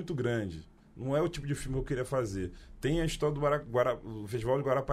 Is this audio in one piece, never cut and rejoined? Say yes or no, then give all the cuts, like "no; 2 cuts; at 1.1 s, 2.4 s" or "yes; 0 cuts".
yes; 0 cuts